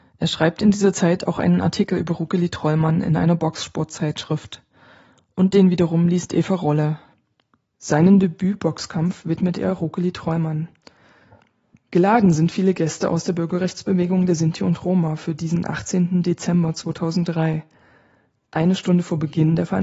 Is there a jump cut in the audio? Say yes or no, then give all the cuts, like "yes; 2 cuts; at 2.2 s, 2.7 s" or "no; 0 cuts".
yes; 1 cut; at 7.7 s